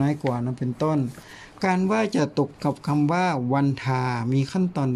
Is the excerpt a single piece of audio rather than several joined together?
yes; 0 cuts

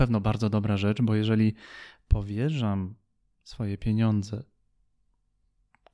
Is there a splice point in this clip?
no; 0 cuts

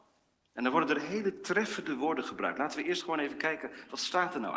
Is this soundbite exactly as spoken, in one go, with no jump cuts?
yes; 0 cuts

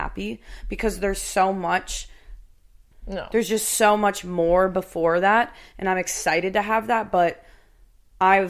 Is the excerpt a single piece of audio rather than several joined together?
no; 1 cut; at 2.9 s

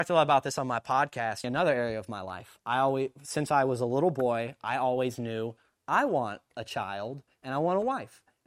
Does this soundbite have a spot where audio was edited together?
yes; 1 cut; at 1.4 s

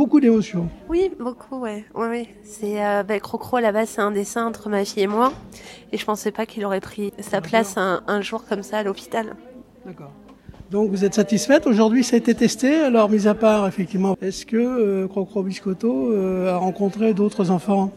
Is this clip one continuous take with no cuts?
no; 2 cuts; at 7.1 s, 14.1 s

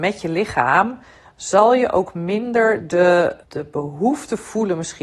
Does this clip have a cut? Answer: yes; 1 cut; at 3.4 s

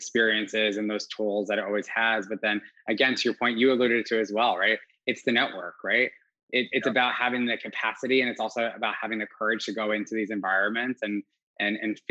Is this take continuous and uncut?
yes; 0 cuts

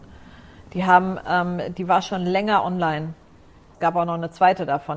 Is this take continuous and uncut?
no; 1 cut; at 3.7 s

